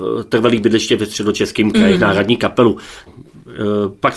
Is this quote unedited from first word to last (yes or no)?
no